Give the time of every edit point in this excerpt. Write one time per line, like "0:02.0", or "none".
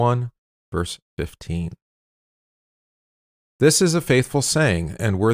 0:03.4